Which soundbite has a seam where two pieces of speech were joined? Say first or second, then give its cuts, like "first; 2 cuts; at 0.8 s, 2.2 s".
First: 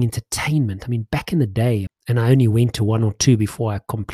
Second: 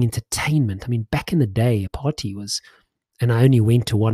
first; 1 cut; at 1.9 s